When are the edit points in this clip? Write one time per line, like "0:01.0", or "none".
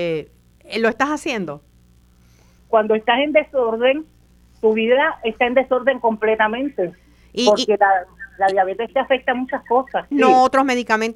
0:02.6
0:10.1